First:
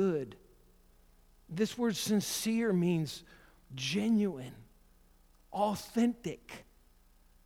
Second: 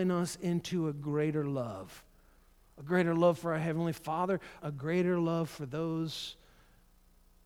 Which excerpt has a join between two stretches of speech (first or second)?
second